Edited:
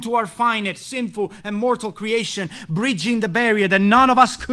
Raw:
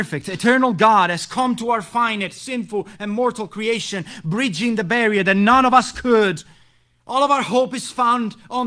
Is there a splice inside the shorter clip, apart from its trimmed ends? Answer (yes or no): no